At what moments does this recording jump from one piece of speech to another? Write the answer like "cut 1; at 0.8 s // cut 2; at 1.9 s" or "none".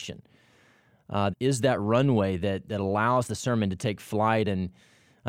cut 1; at 1.3 s